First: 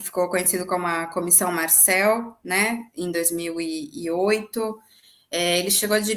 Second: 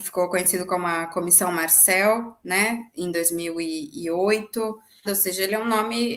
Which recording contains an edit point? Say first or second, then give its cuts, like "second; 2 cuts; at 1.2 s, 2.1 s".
second; 1 cut; at 5.0 s